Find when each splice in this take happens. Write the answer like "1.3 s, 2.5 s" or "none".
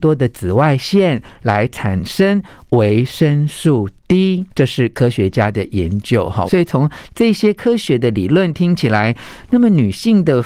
4.5 s, 6.5 s